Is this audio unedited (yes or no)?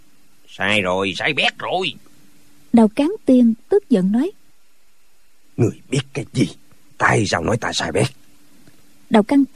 no